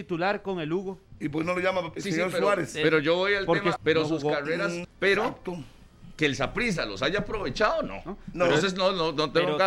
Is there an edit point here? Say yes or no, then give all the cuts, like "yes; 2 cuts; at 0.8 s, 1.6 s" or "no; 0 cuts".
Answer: yes; 3 cuts; at 2.0 s, 3.8 s, 4.8 s